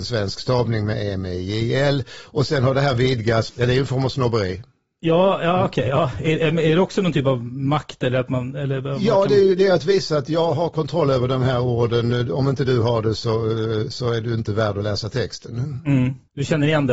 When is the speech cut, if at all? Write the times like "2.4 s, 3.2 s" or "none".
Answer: 3.5 s